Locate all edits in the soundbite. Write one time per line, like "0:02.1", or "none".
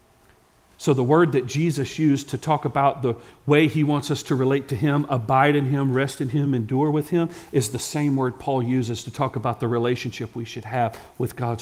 none